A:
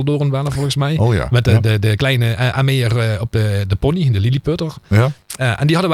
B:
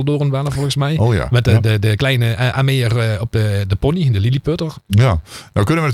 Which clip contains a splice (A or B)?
B